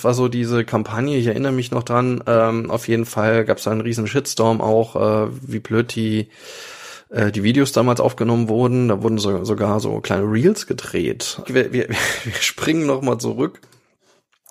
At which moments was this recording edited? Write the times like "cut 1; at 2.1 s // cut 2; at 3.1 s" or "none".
cut 1; at 11.5 s